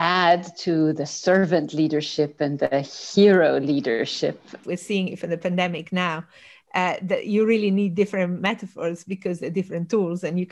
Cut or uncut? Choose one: cut